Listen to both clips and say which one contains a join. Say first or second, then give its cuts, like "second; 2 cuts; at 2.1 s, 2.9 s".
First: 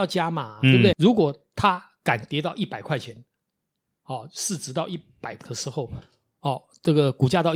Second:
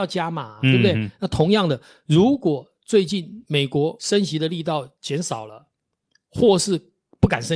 first; 1 cut; at 0.9 s